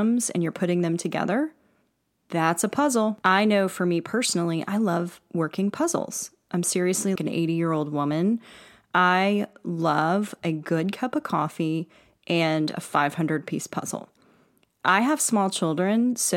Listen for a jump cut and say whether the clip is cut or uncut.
cut